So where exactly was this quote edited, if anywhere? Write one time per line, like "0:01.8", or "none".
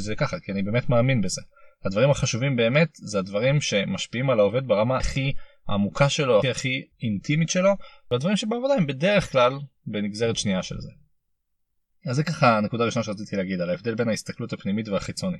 0:05.0
0:06.4